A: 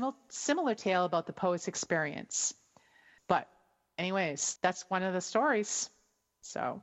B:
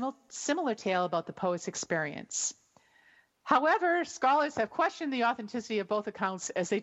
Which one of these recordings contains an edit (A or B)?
A